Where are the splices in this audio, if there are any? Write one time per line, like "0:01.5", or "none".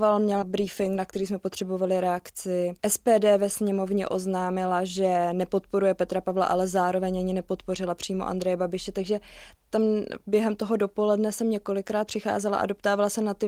0:02.8

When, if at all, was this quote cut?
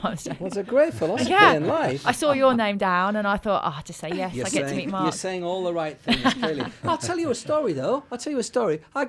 none

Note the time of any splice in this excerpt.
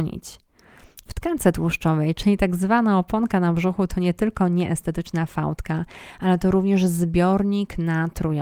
0:01.1

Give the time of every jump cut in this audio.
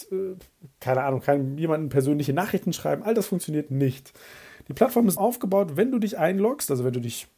0:05.2

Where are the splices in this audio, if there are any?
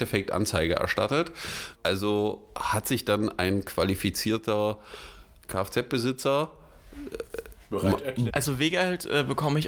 0:01.8
0:08.3

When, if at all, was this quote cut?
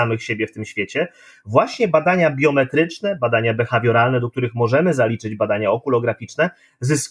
none

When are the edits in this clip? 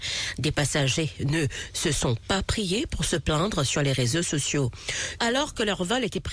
0:05.2

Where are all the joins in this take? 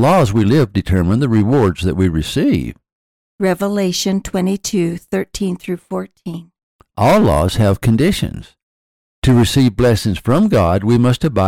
0:03.2
0:06.8

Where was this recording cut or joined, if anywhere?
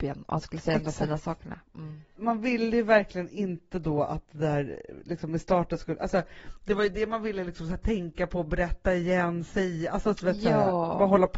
none

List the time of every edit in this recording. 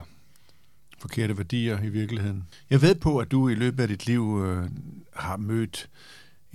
0:02.5

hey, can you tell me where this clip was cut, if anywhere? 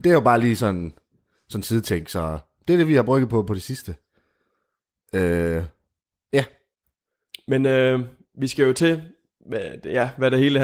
none

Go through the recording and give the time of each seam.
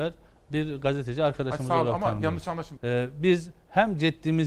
0:02.8

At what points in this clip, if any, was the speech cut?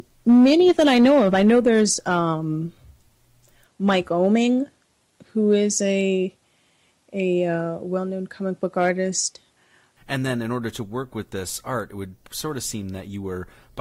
0:10.0

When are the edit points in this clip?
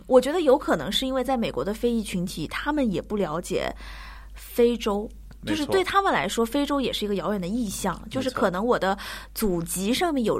none

